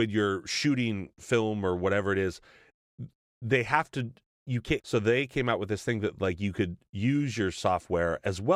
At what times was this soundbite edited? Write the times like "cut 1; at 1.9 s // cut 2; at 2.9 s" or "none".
cut 1; at 4.8 s